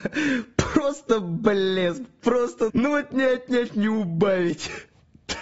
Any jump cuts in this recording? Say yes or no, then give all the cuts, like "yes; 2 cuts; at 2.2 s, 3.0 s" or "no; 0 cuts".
yes; 1 cut; at 2.7 s